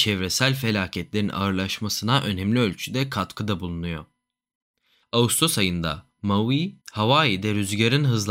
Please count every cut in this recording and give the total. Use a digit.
2